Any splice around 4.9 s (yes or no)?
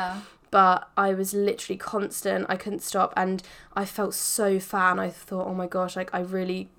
no